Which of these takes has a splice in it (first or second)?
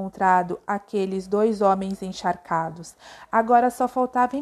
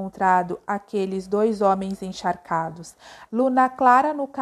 second